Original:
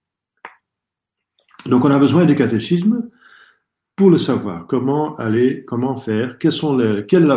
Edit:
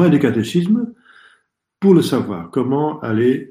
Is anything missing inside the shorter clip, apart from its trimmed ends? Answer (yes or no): no